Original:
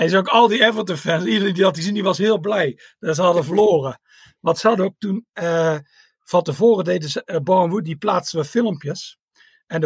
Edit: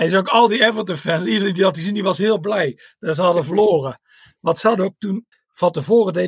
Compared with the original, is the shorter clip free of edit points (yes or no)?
no